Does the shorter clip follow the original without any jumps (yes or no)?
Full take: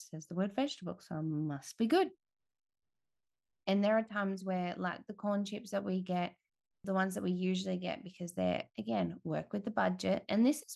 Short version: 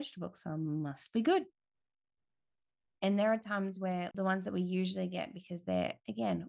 no